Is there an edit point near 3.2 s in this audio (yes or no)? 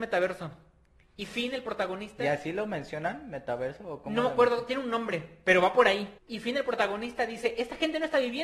no